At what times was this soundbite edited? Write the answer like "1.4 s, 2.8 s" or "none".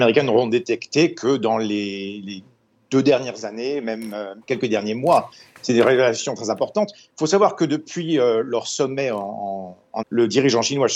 4.4 s, 10.0 s